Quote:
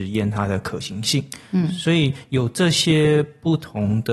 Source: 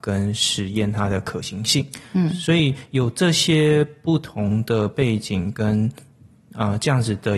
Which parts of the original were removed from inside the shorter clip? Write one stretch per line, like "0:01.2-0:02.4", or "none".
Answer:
none